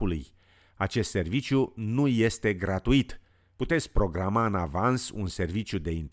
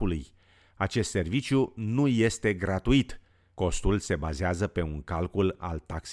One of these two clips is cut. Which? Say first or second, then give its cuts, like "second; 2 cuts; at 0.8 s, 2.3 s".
first; 1 cut; at 3.6 s